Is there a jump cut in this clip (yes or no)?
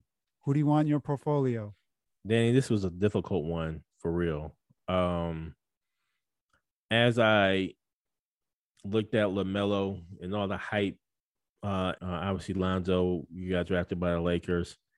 yes